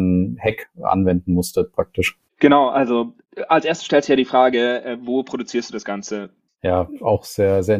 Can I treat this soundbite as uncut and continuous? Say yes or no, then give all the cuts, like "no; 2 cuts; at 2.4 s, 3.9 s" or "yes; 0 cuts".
no; 1 cut; at 6.5 s